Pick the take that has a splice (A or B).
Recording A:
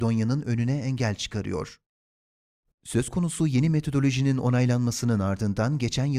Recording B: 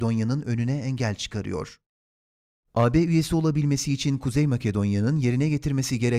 A